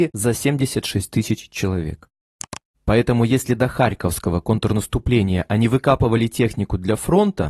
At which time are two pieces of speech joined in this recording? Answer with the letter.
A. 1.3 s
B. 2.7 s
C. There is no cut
B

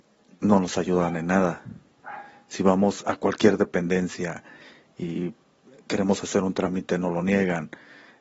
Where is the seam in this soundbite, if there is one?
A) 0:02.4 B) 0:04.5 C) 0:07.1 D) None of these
D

